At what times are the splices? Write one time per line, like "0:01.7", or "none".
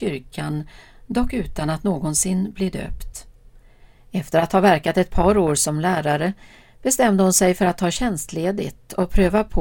0:04.0